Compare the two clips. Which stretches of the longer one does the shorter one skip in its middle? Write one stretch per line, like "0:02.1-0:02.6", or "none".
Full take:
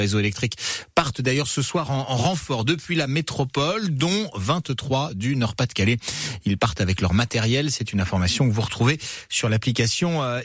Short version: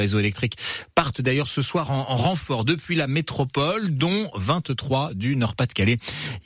none